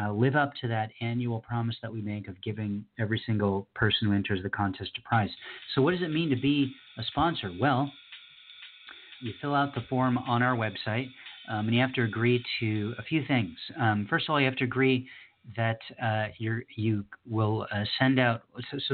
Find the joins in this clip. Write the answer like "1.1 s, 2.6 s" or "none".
9.2 s